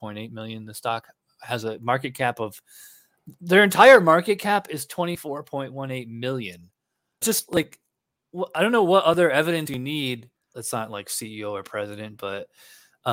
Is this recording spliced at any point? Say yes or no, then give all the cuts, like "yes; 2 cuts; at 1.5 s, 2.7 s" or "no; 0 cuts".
yes; 2 cuts; at 7.2 s, 10.5 s